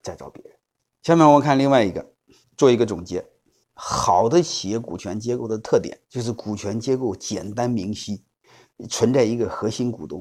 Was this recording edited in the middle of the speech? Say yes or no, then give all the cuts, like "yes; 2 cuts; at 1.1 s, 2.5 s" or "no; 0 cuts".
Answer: yes; 1 cut; at 6.0 s